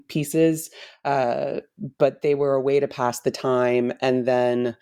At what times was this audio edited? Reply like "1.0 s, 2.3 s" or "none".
none